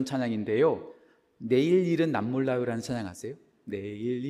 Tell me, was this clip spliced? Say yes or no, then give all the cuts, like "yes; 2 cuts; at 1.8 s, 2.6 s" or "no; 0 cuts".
no; 0 cuts